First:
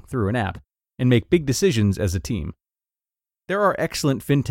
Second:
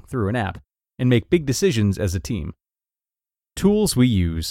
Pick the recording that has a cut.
first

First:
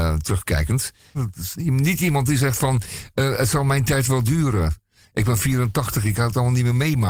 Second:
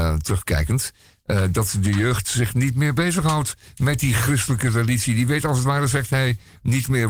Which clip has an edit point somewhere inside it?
first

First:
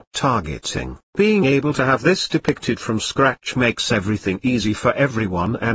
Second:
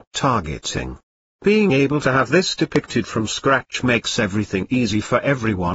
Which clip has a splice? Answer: first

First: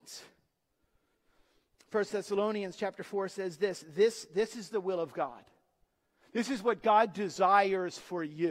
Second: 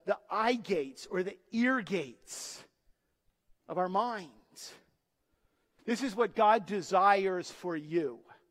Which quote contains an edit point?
second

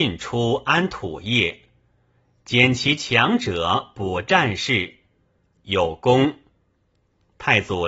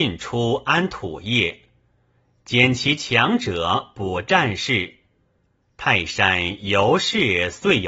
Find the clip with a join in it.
first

